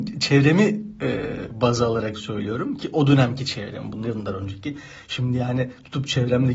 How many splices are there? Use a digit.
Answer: 1